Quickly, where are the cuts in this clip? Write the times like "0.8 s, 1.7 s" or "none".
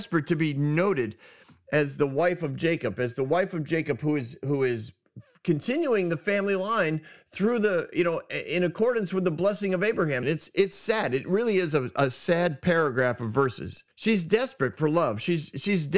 10.2 s, 13.9 s